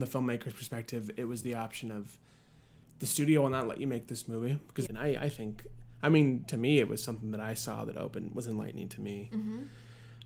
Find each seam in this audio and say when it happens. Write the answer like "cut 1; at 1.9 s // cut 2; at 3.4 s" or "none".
cut 1; at 4.9 s